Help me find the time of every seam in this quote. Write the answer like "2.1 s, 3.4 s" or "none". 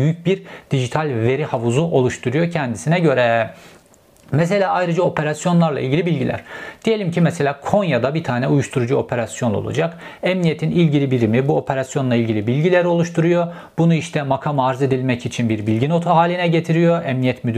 none